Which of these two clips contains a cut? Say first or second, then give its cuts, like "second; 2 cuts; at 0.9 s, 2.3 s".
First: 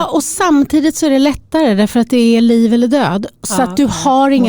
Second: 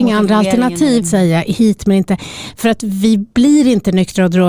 second; 1 cut; at 1.0 s